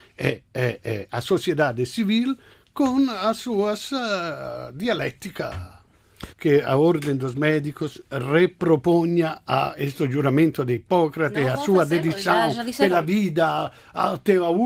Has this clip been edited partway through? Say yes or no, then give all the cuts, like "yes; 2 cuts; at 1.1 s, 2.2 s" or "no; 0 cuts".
yes; 1 cut; at 6.3 s